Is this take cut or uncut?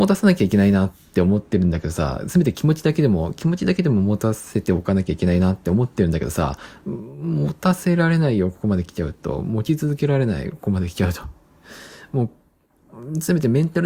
uncut